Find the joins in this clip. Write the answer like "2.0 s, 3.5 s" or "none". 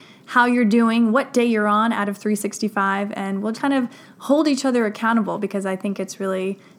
3.5 s